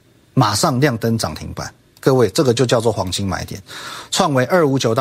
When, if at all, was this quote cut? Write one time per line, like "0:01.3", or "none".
none